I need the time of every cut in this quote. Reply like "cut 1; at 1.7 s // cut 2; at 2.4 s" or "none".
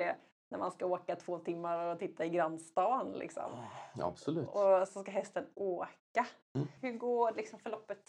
cut 1; at 6.8 s